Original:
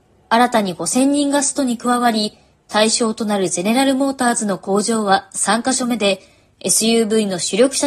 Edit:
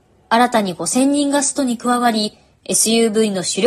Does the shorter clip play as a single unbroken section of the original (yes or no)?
no